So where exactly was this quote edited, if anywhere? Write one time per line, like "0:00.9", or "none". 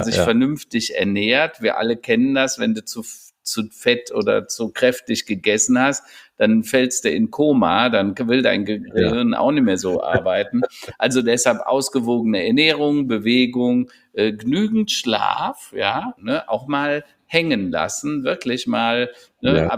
0:16.2